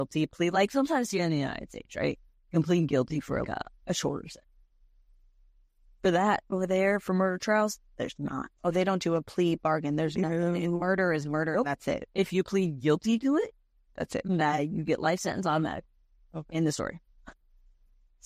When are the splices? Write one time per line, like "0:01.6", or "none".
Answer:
0:03.4